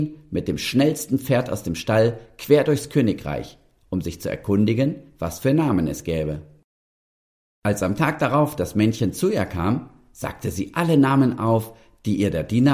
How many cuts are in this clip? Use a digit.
0